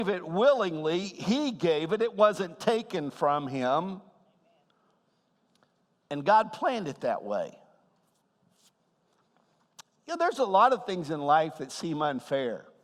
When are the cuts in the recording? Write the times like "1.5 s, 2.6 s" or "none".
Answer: none